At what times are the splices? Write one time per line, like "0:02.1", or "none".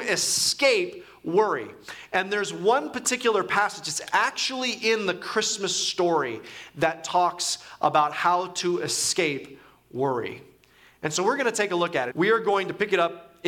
0:12.1